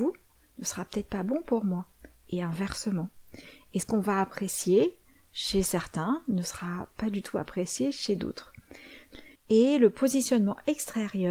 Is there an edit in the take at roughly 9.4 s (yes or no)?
yes